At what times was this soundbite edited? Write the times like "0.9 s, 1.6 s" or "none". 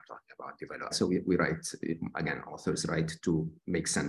0.9 s